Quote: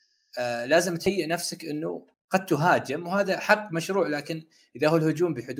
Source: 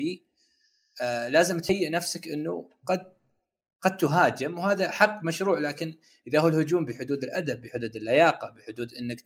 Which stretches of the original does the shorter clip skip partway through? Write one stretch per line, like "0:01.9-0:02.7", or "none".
0:02.8-0:03.7